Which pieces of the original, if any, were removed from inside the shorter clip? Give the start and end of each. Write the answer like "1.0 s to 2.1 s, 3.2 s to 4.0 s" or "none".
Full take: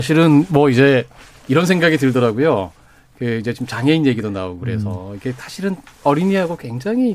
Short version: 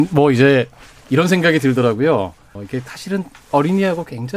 2.9 s to 5.1 s